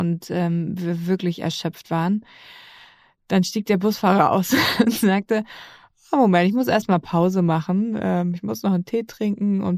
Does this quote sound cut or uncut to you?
uncut